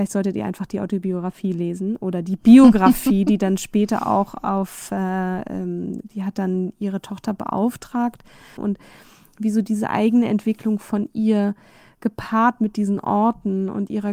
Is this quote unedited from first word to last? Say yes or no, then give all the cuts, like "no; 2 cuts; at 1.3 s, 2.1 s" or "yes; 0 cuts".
no; 1 cut; at 8.6 s